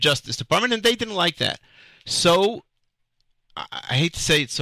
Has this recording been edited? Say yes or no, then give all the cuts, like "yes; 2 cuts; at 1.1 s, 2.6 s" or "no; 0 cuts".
no; 0 cuts